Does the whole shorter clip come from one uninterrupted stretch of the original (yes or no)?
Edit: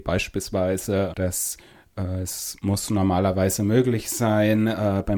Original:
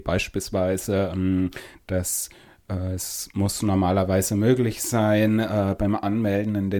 no